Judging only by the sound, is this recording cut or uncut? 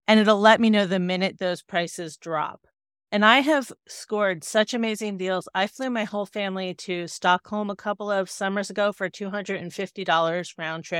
uncut